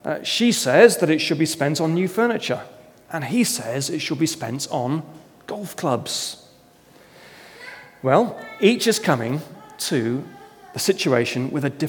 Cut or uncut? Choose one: uncut